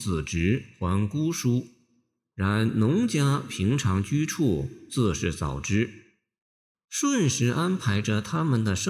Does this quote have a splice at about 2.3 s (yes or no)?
yes